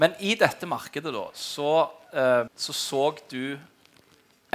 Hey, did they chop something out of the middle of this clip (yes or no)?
yes